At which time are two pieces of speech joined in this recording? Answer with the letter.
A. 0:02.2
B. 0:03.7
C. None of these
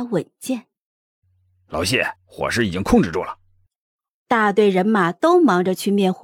A